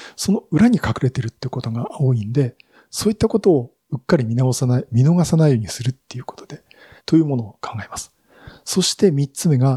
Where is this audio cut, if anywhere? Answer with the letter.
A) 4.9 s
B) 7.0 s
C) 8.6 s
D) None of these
B